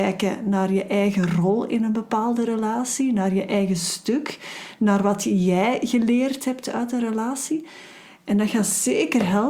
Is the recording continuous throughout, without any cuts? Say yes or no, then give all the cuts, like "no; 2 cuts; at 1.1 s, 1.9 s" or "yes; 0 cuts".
yes; 0 cuts